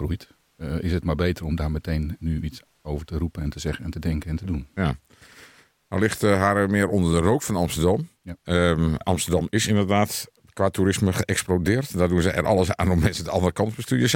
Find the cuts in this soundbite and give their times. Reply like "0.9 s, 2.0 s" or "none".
9.0 s